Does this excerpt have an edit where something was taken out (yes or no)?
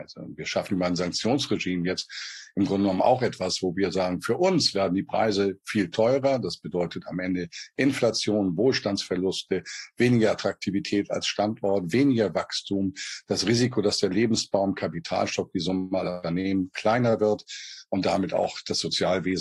no